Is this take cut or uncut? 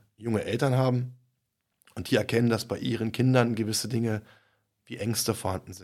uncut